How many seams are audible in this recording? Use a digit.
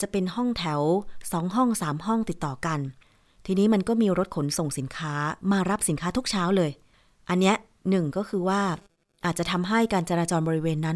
0